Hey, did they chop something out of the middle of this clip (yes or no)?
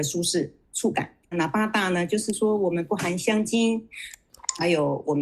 yes